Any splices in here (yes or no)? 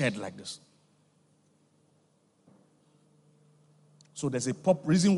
no